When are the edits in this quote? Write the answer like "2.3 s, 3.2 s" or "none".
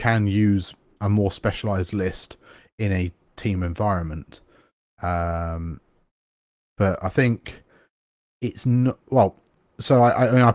none